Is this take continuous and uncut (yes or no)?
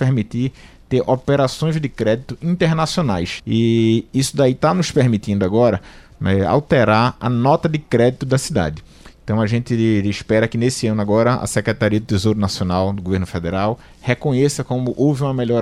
no